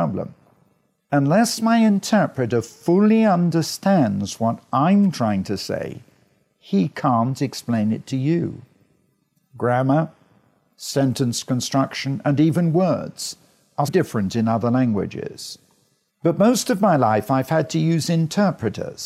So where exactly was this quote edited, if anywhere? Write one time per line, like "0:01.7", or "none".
0:13.9
0:16.1